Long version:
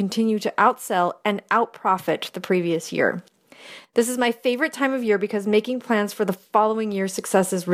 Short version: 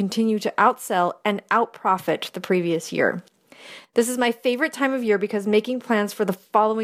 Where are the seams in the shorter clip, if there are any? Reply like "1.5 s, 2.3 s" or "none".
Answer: none